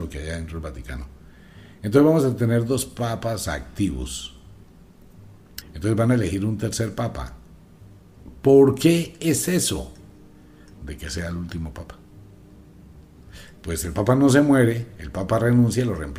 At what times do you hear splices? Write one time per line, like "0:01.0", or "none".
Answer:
0:05.6
0:10.8
0:13.6